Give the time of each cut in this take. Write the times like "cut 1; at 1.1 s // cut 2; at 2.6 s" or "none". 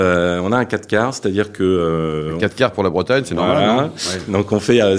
none